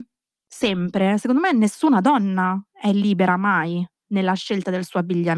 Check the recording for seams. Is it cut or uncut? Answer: uncut